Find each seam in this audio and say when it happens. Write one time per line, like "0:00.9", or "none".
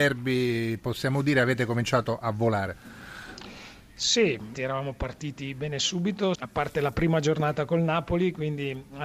0:04.5
0:06.4